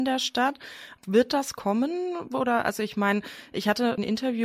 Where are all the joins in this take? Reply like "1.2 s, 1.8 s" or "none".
1.0 s